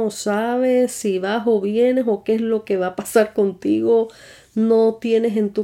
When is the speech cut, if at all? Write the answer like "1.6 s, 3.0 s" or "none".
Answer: none